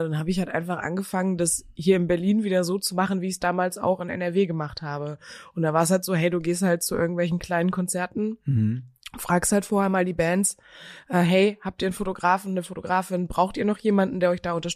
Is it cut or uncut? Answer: uncut